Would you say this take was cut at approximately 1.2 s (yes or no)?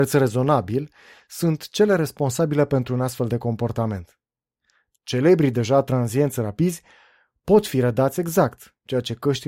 no